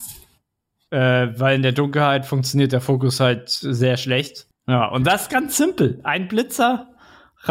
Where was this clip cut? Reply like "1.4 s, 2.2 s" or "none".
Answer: 4.5 s